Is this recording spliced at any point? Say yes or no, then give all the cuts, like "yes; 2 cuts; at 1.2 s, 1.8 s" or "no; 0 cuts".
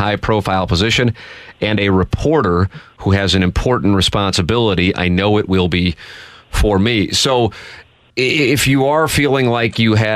no; 0 cuts